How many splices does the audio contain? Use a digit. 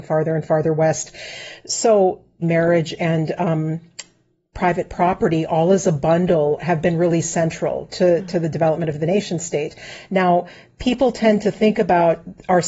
1